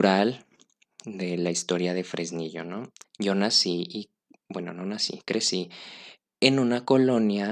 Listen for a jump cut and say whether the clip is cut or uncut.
cut